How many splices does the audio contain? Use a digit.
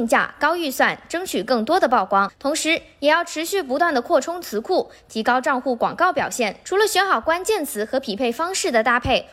0